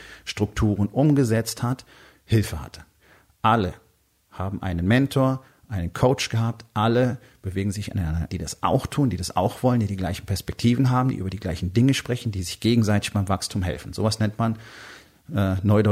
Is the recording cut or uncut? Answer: cut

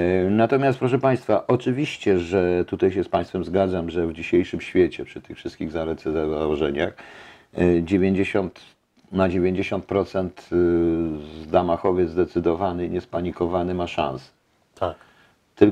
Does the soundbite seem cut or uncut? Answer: uncut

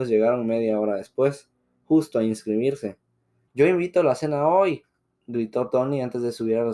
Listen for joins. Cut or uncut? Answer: cut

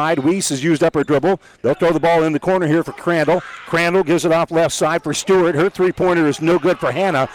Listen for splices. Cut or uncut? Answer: uncut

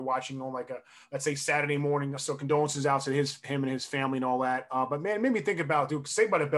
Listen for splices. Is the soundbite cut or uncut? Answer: cut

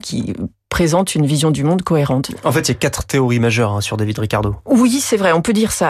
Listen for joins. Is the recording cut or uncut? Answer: uncut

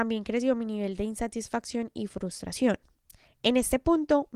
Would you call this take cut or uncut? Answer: uncut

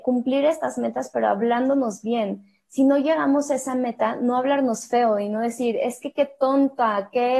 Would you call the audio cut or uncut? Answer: uncut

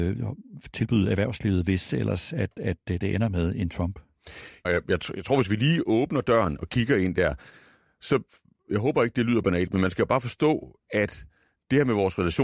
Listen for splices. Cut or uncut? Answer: cut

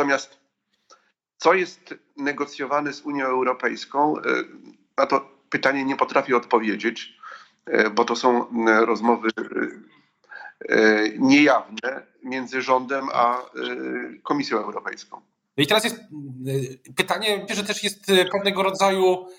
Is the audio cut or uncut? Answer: cut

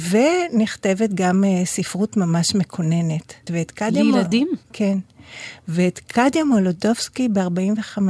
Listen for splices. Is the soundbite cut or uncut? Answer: cut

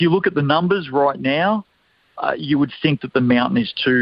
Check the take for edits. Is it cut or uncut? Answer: uncut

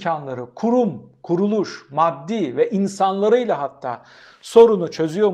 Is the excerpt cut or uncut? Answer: uncut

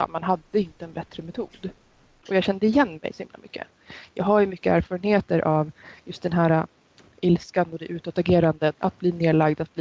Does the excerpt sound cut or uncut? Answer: cut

